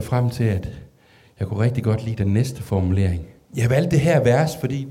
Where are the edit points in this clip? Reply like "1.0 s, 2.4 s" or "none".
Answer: 3.5 s